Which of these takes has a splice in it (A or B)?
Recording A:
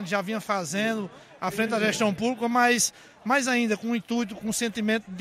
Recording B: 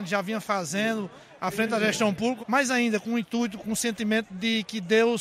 B